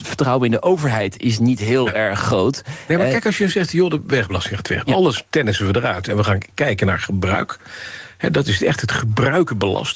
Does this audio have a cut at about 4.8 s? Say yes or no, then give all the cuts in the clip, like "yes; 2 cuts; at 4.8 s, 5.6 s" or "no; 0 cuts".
yes; 1 cut; at 4.8 s